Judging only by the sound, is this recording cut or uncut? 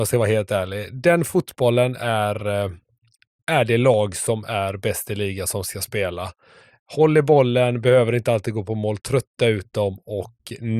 uncut